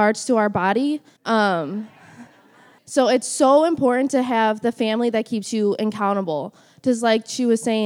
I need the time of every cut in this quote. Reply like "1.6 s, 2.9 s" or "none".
1.2 s, 2.8 s